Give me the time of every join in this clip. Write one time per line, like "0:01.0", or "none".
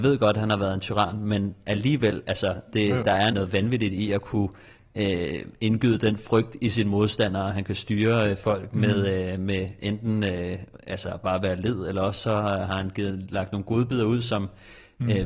0:03.3